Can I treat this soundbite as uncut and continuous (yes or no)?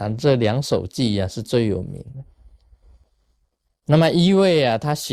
yes